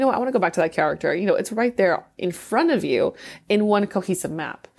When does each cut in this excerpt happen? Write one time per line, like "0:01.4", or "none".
none